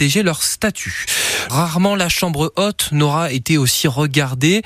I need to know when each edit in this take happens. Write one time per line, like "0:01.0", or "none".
0:01.5